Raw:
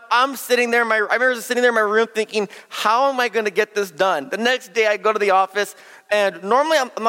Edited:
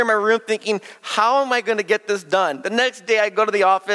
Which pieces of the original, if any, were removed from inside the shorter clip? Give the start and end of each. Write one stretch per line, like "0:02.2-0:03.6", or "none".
none